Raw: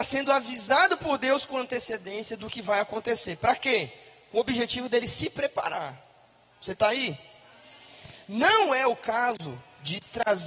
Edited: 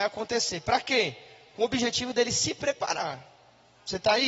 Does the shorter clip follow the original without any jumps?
yes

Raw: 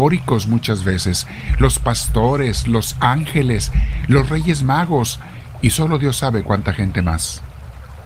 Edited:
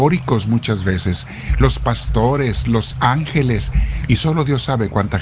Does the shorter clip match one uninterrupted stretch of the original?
no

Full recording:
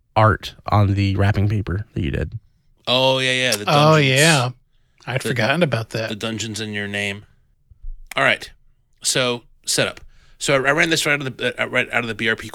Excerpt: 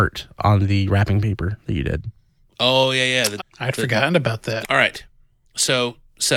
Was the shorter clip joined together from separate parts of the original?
yes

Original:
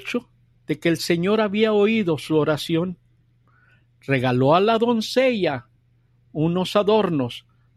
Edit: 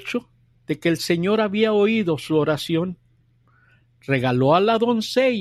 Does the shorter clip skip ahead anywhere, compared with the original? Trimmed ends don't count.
no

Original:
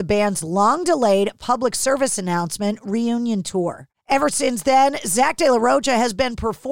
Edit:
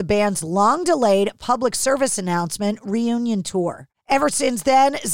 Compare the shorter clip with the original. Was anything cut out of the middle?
no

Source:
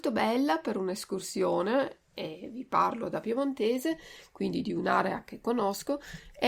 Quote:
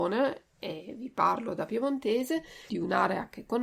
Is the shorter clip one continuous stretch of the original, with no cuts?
no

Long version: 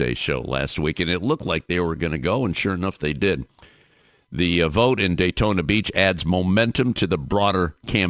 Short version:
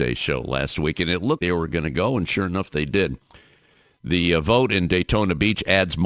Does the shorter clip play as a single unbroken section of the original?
no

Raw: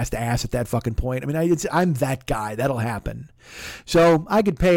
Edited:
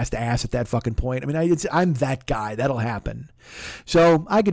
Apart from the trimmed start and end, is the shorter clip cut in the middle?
no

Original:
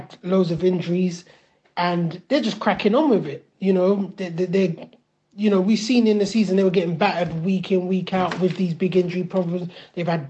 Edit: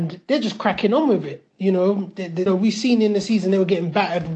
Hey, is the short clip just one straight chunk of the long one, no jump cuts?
no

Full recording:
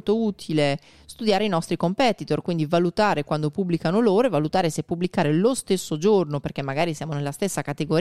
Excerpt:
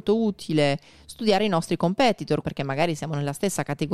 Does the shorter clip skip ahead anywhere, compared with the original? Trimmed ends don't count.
yes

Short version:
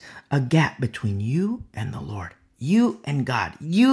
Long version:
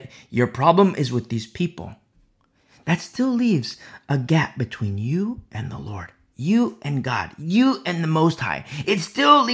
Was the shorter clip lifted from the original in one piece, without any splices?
yes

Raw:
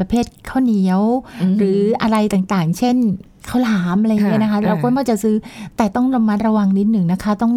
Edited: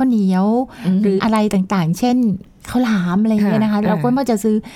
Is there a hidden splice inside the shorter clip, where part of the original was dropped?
yes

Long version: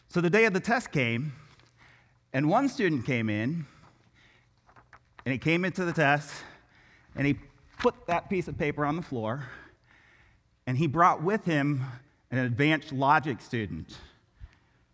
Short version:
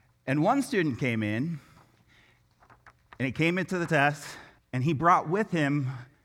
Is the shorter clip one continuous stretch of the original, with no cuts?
no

